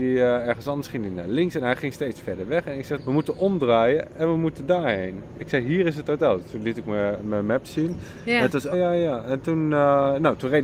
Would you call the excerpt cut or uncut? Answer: cut